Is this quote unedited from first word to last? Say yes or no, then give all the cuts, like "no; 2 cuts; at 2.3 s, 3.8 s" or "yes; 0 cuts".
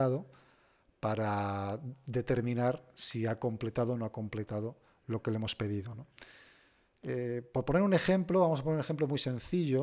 yes; 0 cuts